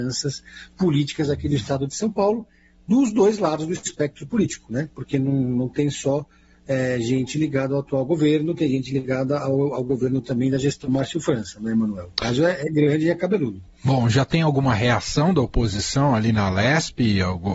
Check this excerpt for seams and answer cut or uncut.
uncut